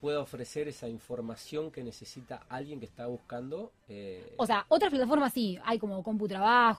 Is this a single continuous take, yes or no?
yes